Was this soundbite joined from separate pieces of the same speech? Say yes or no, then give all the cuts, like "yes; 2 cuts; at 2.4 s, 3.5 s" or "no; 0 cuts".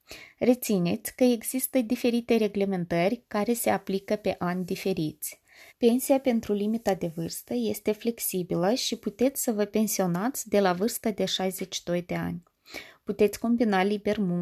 yes; 1 cut; at 5.7 s